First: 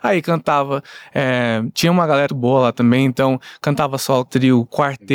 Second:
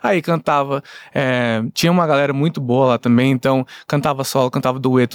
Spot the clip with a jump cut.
first; 2 cuts; at 2.3 s, 4.2 s

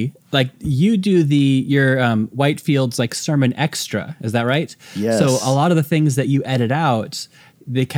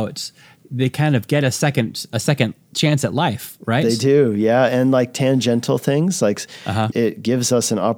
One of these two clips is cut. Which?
second; 1 cut; at 6.9 s

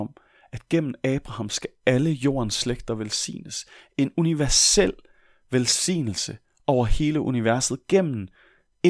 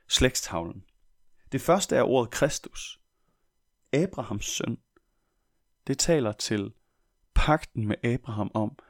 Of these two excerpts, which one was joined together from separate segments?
second; 1 cut; at 3.8 s

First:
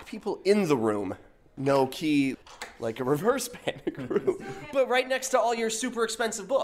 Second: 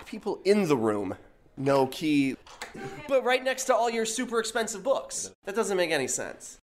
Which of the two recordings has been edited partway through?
second; 1 cut; at 2.7 s

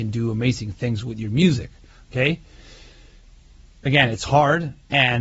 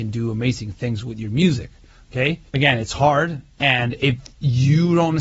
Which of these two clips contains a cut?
second; 1 cut; at 2.5 s

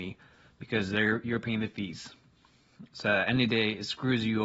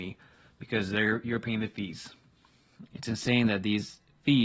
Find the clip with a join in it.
second; 1 cut; at 2.9 s

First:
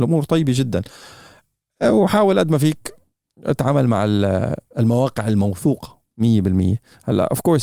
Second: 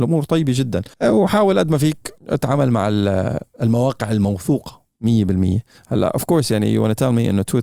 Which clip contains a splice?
second; 2 cuts; at 0.9 s, 2.2 s

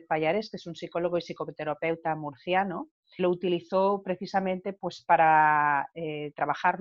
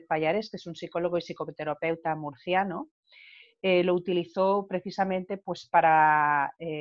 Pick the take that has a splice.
first; 1 cut; at 3.2 s

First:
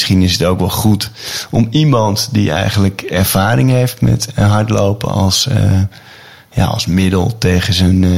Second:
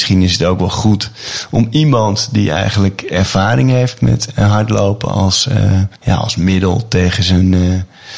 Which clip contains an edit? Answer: second; 1 cut; at 6.0 s

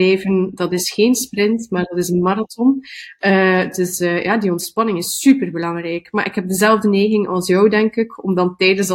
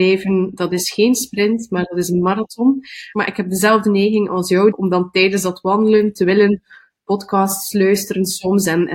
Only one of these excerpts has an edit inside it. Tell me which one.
second; 2 cuts; at 3.1 s, 4.7 s

